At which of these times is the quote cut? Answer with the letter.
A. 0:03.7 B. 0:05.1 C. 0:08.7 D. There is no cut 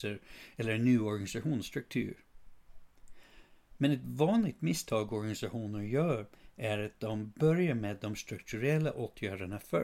D